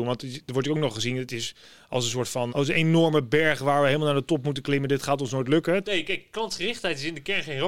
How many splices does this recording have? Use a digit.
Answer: 2